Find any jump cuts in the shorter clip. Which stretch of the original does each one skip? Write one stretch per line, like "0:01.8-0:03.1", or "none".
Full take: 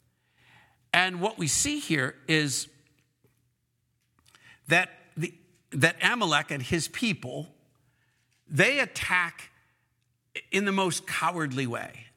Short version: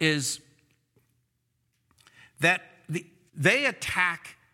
0:05.6-0:08.4